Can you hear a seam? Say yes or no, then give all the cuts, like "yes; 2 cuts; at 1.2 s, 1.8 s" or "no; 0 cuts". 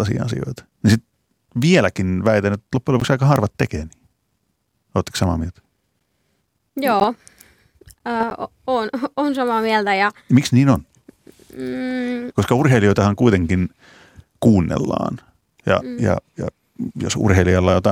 no; 0 cuts